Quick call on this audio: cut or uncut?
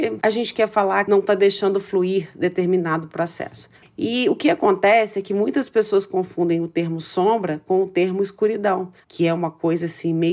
cut